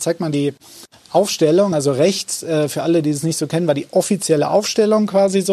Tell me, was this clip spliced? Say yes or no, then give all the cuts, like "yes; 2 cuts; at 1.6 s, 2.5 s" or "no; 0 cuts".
no; 0 cuts